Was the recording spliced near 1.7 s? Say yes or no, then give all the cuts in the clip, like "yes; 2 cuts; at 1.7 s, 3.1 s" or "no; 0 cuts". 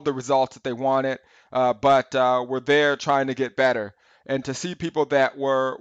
no; 1 cut; at 4.4 s